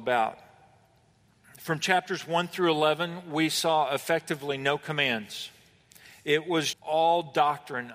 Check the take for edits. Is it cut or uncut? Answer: cut